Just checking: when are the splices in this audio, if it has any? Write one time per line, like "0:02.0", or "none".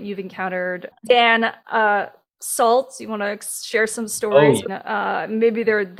0:00.9
0:04.7